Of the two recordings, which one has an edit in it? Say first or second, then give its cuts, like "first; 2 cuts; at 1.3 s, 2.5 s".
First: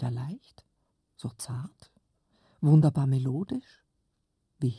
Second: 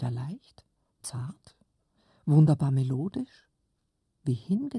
second; 1 cut; at 1.0 s